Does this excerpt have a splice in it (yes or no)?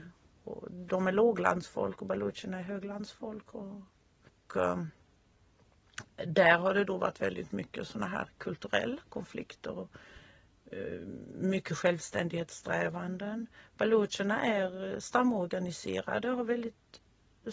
no